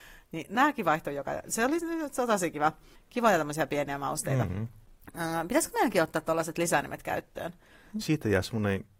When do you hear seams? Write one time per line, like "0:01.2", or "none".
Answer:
0:08.0